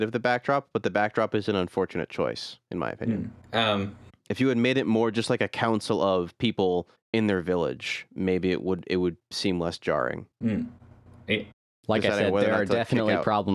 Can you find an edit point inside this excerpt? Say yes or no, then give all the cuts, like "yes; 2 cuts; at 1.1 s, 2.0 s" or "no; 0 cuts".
no; 0 cuts